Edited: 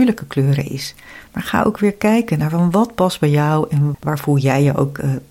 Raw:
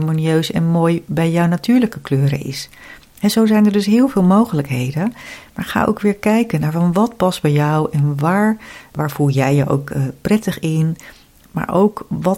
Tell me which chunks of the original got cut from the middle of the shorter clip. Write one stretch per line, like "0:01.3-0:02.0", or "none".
0:03.0-0:05.5
0:08.2-0:08.9